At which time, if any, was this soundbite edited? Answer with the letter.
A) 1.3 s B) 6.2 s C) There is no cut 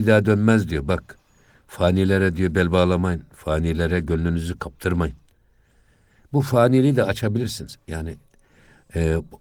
C